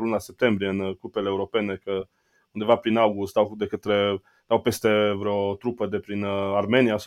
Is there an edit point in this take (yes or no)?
no